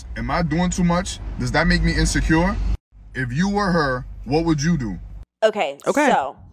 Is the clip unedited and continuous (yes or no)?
yes